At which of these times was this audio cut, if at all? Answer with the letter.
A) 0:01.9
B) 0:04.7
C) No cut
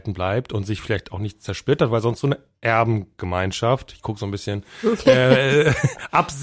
C